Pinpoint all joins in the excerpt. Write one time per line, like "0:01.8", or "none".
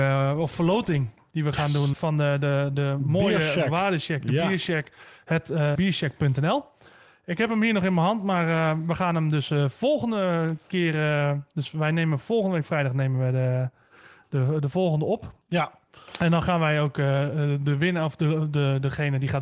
0:01.9
0:05.7